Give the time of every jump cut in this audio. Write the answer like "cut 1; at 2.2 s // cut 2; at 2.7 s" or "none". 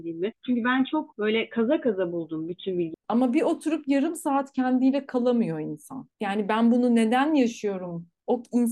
cut 1; at 2.9 s